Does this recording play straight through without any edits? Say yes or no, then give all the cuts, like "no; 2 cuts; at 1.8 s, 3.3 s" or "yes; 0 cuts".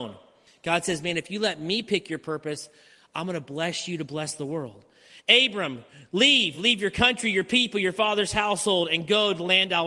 yes; 0 cuts